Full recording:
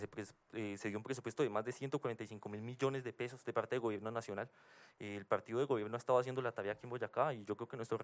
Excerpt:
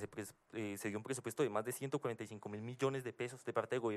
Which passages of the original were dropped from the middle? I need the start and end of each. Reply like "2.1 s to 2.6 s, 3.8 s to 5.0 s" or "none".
none